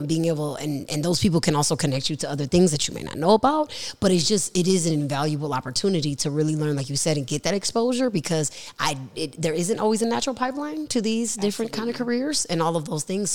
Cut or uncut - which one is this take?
uncut